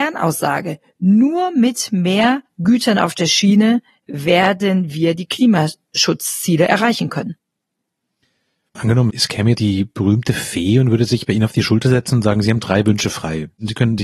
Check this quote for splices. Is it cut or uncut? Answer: uncut